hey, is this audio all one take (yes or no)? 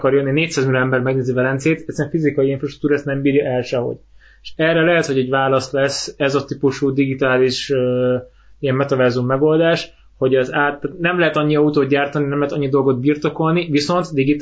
yes